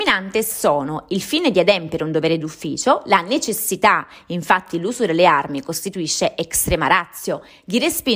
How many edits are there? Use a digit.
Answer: 0